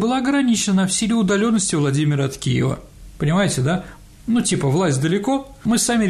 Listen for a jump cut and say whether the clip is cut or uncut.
uncut